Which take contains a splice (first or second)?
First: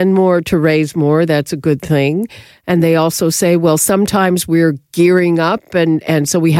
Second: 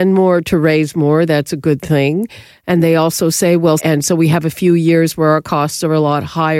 second